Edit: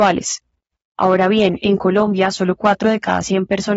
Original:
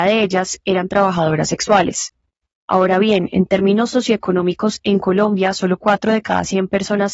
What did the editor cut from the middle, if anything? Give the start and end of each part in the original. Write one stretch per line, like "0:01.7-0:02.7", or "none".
0:03.3-0:04.8